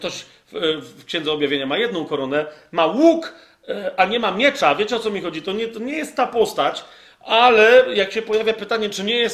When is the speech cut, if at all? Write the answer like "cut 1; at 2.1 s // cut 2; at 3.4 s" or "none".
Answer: none